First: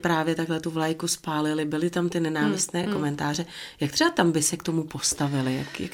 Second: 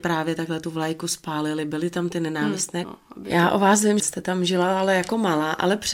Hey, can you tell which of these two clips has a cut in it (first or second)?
second